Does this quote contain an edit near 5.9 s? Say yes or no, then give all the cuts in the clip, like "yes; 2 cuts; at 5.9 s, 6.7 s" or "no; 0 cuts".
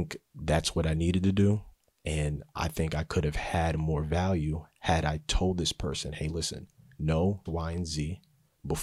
no; 2 cuts; at 1.9 s, 7.5 s